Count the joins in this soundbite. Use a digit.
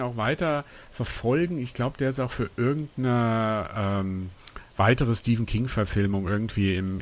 0